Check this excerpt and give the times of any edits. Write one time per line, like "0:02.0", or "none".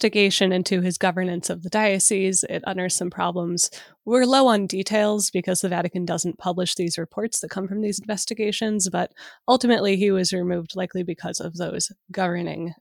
none